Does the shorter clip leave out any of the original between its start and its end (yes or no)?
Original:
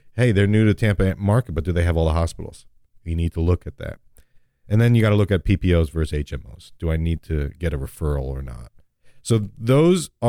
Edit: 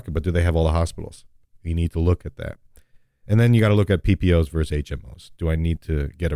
no